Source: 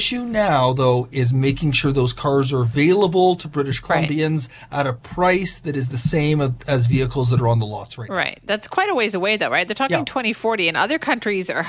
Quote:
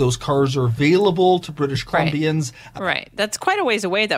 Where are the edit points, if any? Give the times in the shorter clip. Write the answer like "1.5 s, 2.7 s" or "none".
2.8 s